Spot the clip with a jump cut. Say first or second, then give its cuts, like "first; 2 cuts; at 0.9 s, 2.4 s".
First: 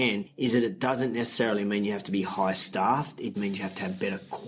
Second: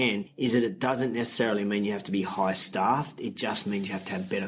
first; 1 cut; at 3.3 s